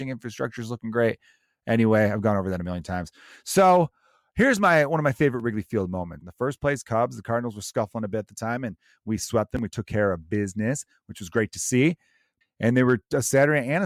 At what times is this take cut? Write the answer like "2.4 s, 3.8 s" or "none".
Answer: 6.2 s, 12.4 s